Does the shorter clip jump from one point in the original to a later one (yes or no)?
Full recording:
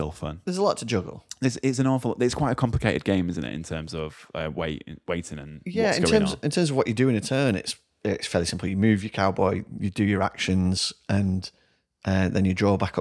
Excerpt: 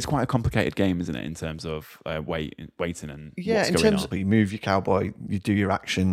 yes